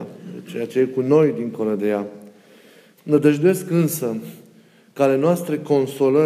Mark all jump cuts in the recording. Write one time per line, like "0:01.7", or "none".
0:03.0